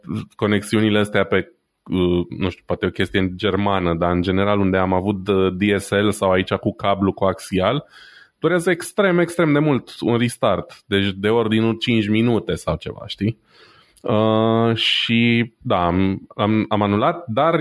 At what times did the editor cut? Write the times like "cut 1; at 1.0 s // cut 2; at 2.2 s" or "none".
none